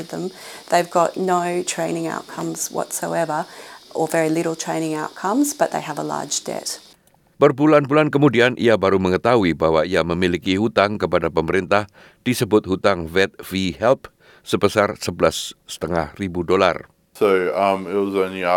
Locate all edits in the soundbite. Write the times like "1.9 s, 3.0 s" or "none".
7.3 s